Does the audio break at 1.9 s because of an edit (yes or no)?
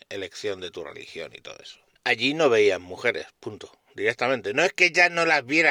yes